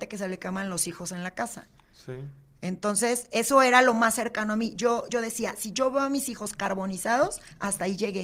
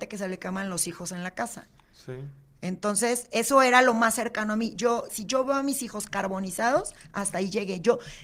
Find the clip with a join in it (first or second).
second